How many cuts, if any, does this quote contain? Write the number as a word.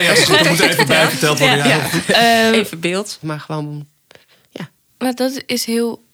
one